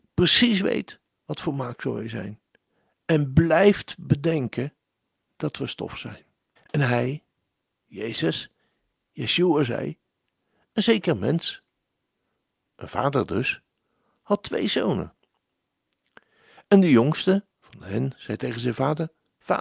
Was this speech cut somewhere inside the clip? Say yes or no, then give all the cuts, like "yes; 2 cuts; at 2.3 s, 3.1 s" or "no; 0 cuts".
yes; 2 cuts; at 6.6 s, 17.5 s